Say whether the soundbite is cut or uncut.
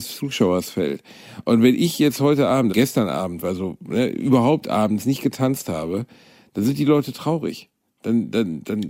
cut